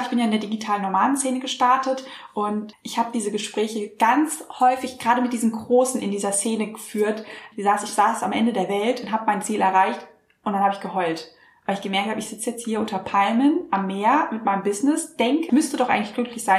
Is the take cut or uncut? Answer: cut